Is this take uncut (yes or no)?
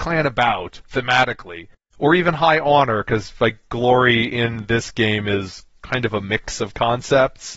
no